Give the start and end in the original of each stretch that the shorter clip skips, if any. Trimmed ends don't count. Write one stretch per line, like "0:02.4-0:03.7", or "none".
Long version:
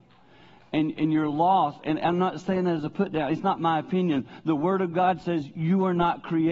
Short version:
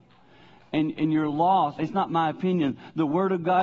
0:01.8-0:03.3